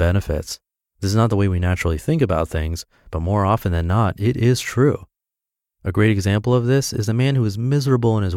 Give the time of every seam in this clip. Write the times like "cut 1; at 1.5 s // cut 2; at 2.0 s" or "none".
none